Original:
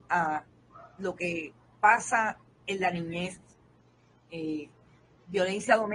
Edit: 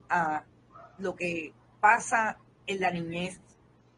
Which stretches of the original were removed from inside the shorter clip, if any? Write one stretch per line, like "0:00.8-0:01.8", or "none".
none